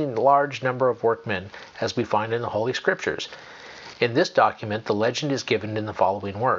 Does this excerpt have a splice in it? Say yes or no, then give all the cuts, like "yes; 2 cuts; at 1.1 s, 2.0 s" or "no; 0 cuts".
yes; 1 cut; at 3.9 s